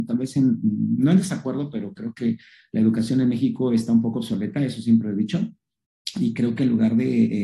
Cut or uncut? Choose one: uncut